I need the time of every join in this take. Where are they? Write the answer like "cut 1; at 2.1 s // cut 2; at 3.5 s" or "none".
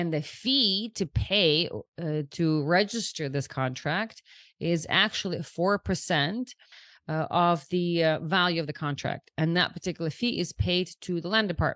none